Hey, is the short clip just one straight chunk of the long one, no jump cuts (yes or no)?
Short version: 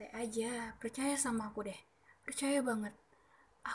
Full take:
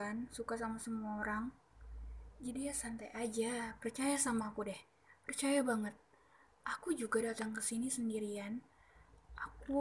yes